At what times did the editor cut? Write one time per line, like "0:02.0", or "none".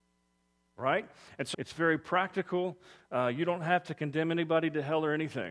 0:01.5